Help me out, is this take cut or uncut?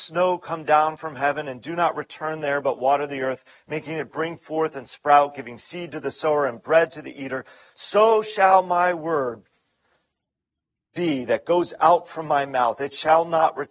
uncut